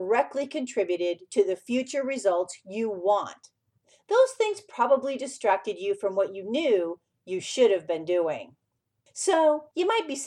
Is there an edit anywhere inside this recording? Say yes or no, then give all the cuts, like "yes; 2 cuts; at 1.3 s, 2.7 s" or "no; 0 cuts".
yes; 1 cut; at 3.9 s